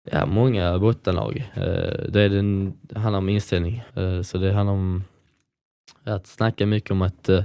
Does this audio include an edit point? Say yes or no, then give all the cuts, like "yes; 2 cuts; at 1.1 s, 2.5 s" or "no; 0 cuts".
yes; 1 cut; at 3.9 s